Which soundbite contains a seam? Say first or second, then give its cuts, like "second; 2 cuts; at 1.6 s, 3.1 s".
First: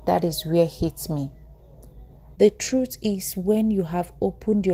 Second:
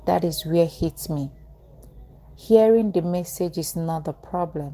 first; 1 cut; at 2.3 s